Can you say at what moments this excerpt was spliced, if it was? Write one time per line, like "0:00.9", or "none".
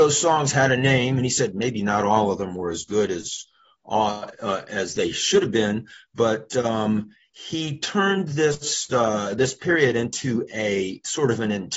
0:04.3